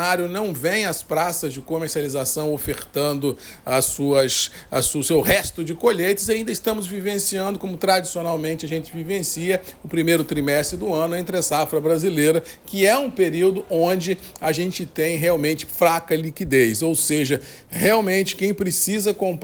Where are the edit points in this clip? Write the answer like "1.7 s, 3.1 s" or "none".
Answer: none